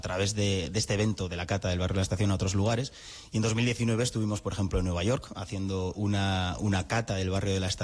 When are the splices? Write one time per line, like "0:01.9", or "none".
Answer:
none